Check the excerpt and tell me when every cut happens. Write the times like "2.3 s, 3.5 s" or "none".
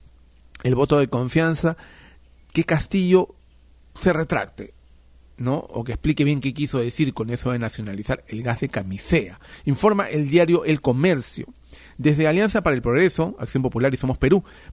none